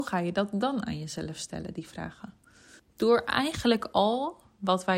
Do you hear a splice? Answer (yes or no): yes